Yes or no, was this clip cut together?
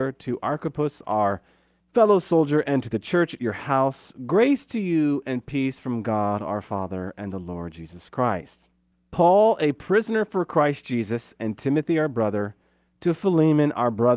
yes